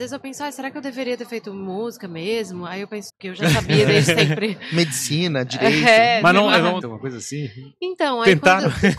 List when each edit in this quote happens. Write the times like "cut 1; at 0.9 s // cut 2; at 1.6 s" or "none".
cut 1; at 3.1 s // cut 2; at 6.8 s